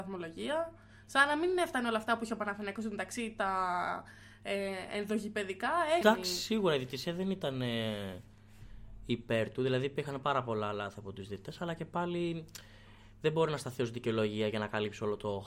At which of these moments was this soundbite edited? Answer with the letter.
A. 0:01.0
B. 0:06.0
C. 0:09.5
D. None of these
B